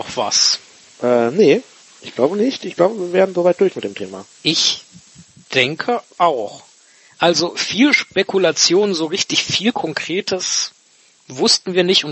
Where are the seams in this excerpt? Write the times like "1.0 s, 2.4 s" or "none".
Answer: none